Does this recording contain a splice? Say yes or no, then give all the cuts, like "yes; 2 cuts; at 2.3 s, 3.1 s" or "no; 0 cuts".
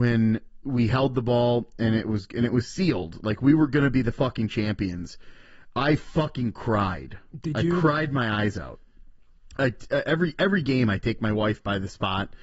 no; 0 cuts